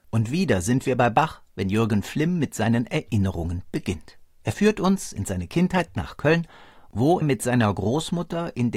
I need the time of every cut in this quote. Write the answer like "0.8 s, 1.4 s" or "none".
7.2 s

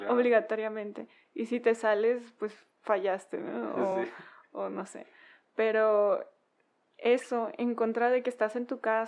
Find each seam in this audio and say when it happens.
none

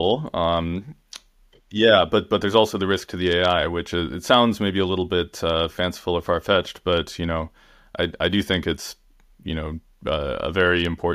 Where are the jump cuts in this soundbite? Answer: none

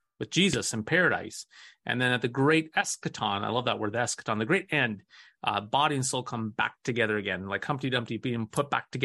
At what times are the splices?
none

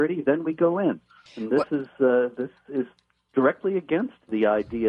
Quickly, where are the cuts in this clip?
1.3 s

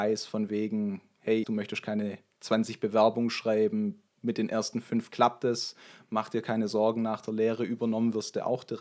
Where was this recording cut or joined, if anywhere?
1.4 s

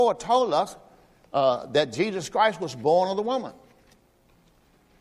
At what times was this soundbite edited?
none

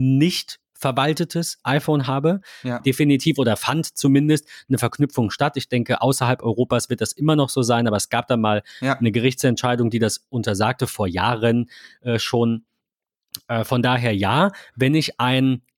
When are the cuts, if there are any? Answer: 2.8 s

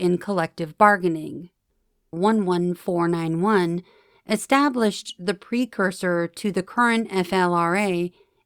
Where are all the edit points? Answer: 2.1 s

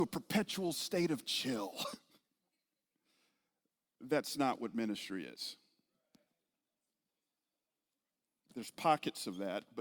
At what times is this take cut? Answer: none

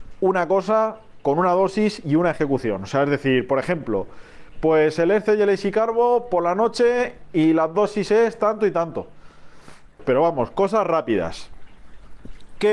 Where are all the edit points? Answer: 10.0 s

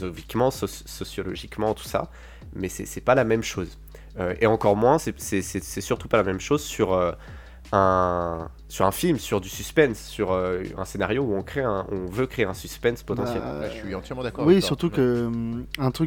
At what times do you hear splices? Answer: none

